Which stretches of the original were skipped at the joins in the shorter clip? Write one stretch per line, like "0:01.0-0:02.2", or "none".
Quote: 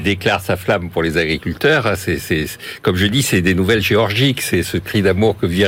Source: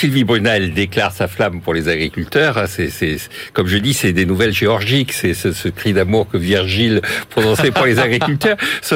0:05.3-0:05.5